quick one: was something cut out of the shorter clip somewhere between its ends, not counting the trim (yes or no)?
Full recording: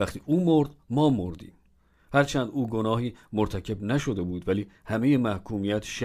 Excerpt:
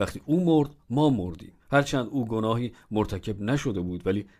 yes